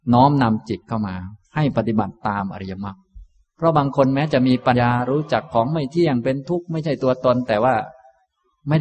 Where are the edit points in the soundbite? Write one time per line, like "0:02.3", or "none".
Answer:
0:04.7

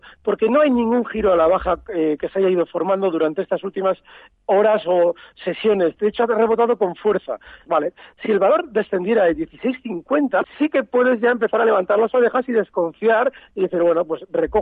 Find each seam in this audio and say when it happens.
0:07.7
0:10.4

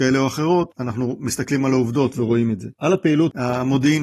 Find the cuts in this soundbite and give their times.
0:02.7

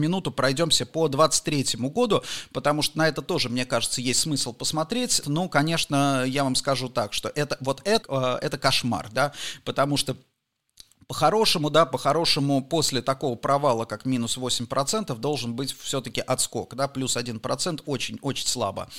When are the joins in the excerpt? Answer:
0:05.2
0:08.0

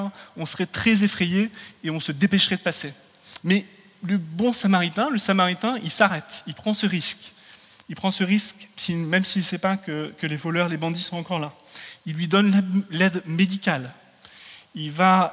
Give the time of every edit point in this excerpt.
none

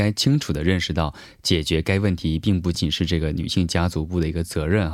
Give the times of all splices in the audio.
0:02.7

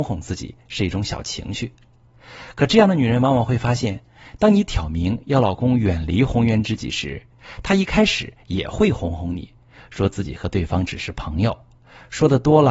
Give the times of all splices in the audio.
none

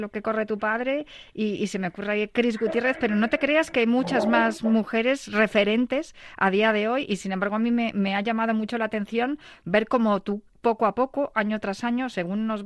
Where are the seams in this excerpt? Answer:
none

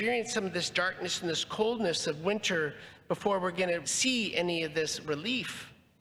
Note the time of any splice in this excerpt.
0:03.8

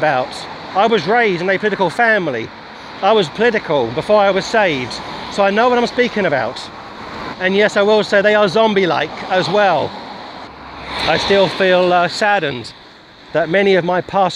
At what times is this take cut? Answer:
0:03.3
0:07.3
0:10.5

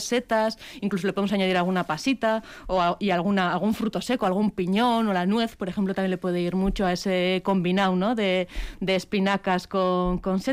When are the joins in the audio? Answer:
none

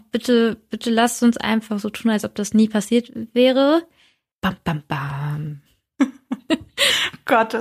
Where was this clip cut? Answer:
0:04.3

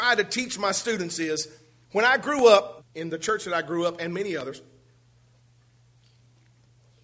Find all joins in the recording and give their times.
0:02.8

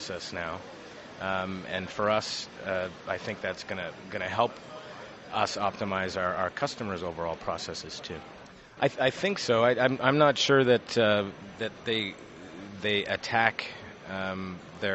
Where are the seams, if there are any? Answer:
0:08.8

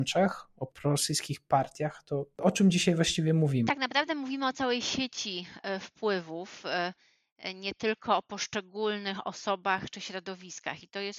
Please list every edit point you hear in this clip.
0:03.7

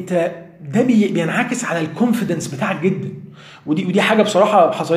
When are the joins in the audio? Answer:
none

